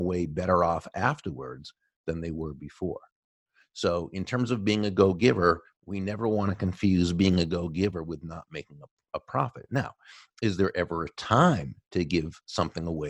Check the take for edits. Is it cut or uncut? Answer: uncut